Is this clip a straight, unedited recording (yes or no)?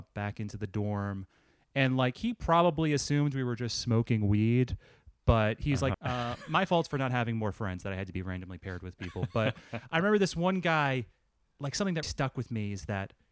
no